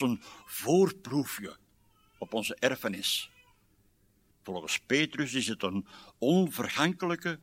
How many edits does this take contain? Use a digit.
1